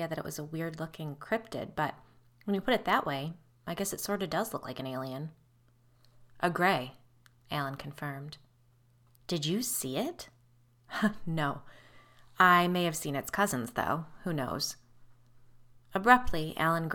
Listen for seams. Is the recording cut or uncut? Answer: uncut